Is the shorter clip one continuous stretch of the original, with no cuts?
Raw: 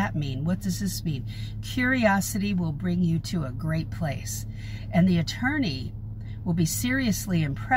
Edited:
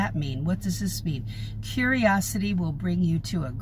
yes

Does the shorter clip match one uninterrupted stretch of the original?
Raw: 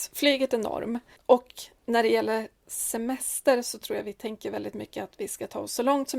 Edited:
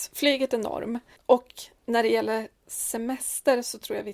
yes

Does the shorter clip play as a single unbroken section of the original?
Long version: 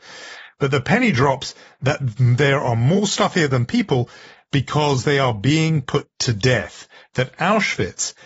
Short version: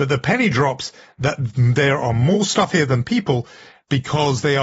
yes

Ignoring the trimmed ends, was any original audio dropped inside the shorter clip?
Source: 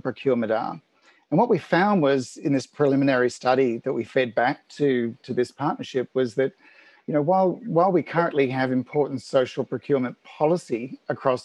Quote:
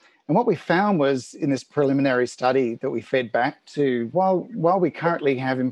yes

